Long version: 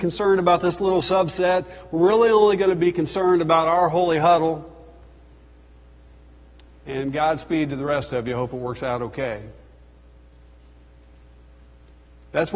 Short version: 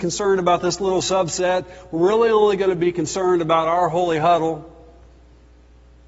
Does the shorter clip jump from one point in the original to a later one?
no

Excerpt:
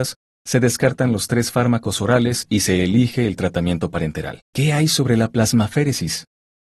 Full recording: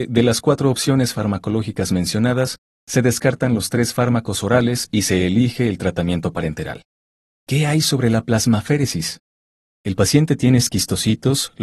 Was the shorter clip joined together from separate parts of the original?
yes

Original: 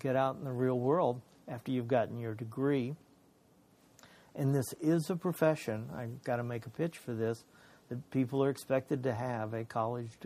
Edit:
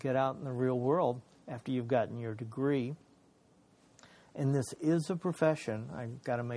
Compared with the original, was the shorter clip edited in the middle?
no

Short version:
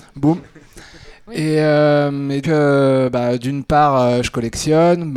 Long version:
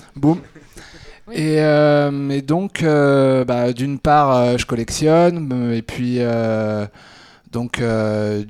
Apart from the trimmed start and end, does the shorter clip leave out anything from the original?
yes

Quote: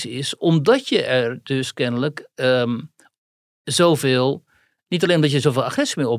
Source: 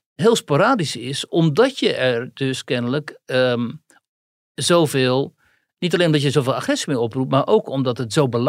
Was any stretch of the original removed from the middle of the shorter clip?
no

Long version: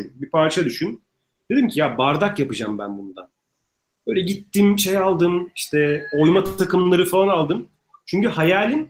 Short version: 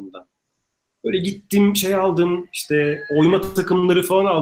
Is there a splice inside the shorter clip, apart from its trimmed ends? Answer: no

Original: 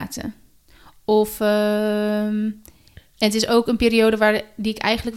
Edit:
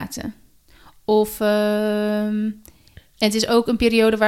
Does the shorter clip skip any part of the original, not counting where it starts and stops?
no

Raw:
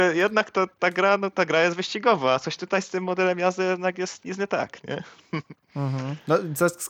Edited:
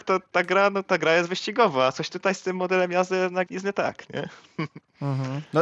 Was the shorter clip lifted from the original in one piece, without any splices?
no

